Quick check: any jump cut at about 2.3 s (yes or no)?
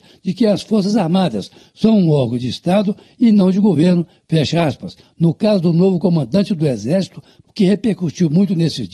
no